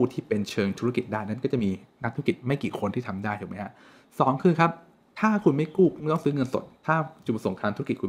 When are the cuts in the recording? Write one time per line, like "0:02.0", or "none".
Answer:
none